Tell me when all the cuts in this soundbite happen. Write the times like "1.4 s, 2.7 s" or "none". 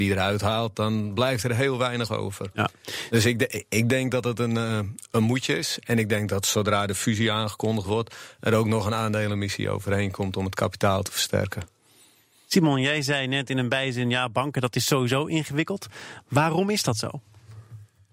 none